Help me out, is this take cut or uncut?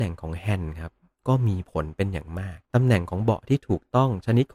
cut